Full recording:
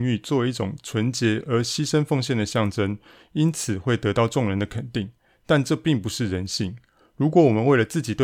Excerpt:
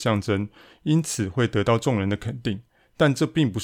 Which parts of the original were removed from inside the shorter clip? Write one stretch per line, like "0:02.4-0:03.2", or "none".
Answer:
none